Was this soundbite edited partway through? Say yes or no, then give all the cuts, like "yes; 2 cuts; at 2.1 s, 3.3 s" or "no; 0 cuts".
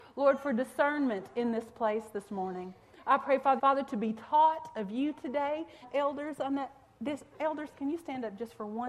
yes; 3 cuts; at 3.6 s, 5.8 s, 7.3 s